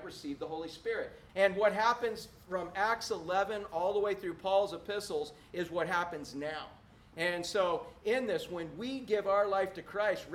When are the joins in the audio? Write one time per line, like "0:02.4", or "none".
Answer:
0:01.3